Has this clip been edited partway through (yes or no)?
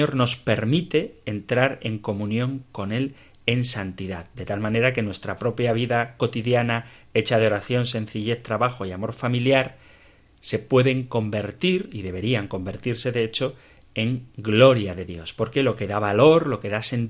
no